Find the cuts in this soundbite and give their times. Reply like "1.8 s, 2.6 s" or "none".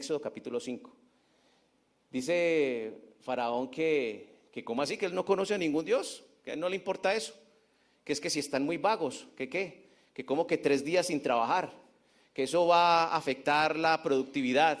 none